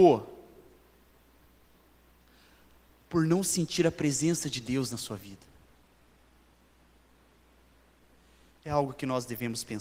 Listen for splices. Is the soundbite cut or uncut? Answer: uncut